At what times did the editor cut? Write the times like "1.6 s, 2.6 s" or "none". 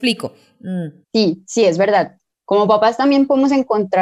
1.0 s, 2.3 s